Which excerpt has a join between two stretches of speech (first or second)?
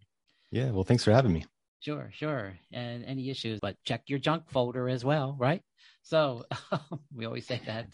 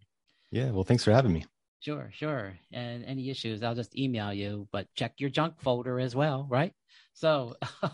first